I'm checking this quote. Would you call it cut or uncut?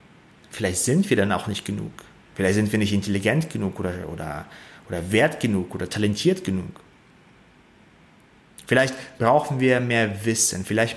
uncut